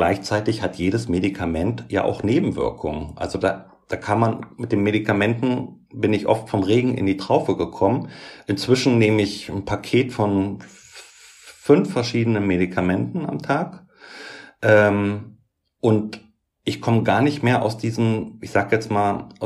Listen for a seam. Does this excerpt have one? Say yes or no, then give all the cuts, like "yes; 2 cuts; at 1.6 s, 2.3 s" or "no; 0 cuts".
no; 0 cuts